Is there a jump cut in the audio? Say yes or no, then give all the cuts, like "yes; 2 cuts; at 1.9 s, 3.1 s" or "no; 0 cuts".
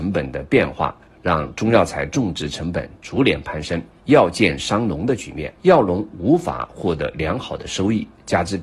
yes; 2 cuts; at 4.0 s, 5.6 s